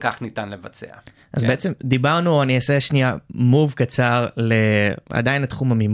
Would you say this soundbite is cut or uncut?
uncut